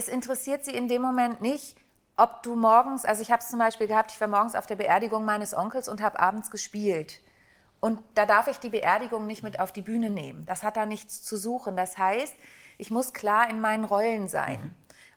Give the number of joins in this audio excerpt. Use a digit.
0